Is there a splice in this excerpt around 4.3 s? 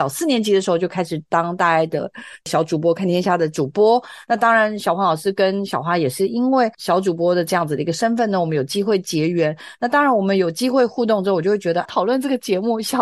no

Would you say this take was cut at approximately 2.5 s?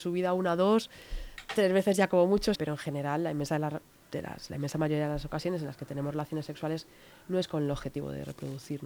yes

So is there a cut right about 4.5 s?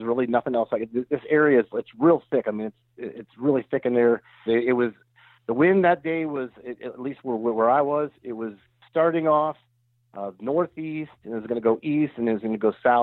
yes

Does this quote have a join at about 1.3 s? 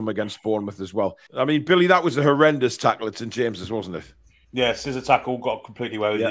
yes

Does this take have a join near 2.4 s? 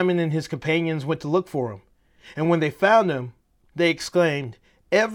no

